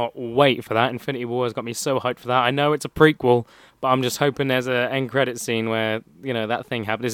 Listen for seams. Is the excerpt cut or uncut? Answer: uncut